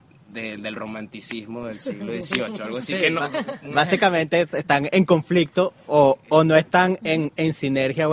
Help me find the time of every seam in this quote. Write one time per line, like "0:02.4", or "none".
none